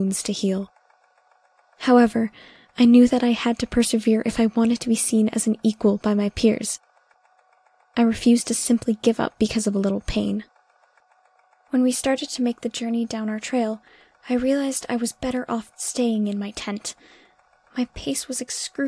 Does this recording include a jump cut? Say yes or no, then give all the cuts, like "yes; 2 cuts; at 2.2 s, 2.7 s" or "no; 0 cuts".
yes; 1 cut; at 15.7 s